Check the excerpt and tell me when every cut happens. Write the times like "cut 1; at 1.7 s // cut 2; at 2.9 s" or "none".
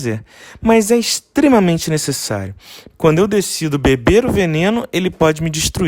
cut 1; at 2.9 s